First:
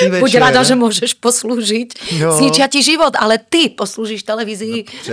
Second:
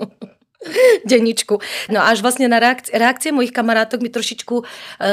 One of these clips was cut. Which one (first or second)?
second